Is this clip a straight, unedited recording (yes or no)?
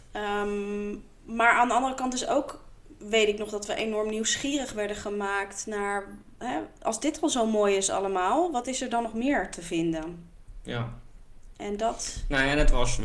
yes